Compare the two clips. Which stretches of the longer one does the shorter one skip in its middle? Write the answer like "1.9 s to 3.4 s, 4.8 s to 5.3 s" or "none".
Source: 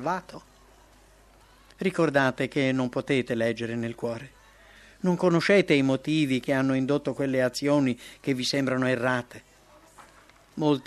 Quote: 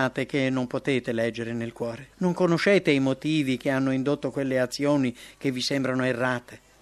4.4 s to 5.0 s